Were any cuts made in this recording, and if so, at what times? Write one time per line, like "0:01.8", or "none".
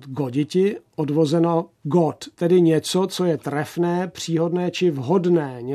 none